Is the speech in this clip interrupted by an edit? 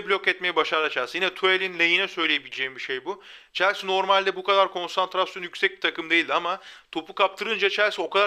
no; 0 cuts

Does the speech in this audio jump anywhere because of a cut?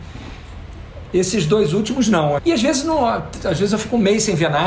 yes; 2 cuts; at 1.0 s, 2.4 s

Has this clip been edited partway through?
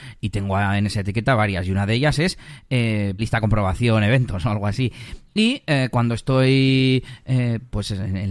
yes; 1 cut; at 3.2 s

